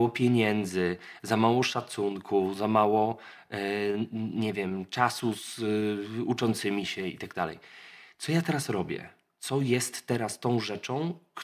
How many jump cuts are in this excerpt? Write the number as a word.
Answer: zero